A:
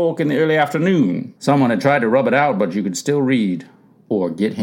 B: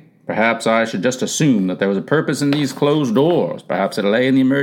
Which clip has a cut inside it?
A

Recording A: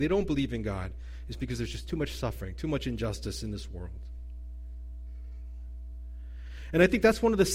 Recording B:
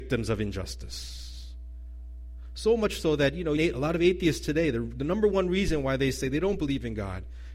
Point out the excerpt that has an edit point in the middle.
B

